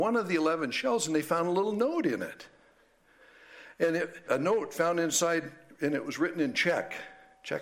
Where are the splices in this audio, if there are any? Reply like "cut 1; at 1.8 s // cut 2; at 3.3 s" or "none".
cut 1; at 4.3 s